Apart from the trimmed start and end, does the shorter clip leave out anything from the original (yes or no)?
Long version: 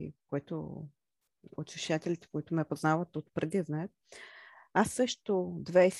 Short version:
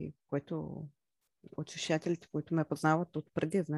no